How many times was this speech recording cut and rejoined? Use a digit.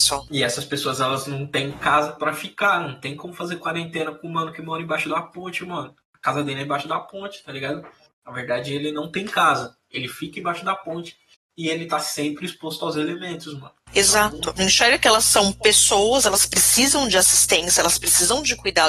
1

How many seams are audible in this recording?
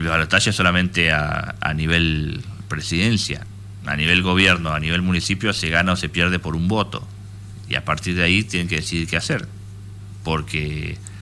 0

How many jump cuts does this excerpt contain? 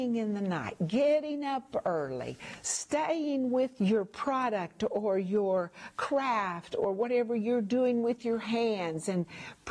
1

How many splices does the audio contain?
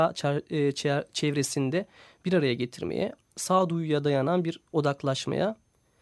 0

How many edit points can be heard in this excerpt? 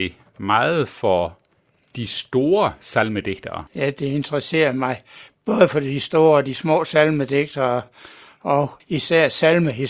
2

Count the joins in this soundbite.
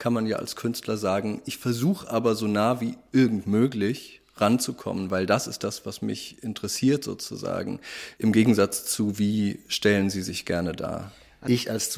1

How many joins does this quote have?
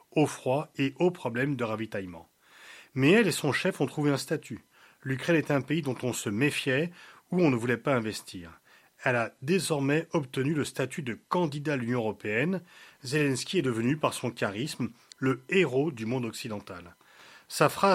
1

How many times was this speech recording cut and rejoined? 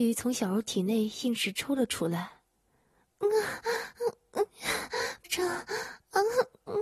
1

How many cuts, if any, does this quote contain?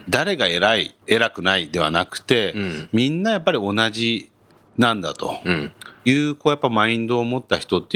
1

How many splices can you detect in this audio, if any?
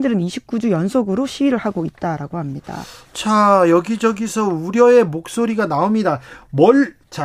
0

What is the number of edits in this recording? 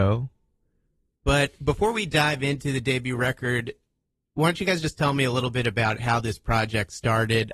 1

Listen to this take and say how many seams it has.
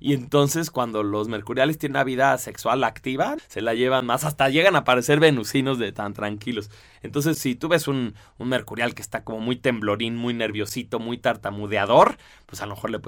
1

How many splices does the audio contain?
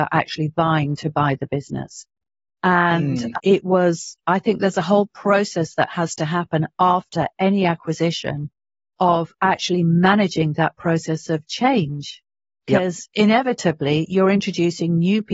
1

